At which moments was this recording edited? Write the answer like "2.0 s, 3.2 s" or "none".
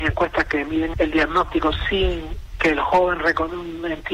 0.9 s